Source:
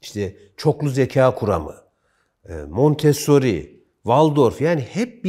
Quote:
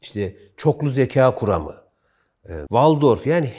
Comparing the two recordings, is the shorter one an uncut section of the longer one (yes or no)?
no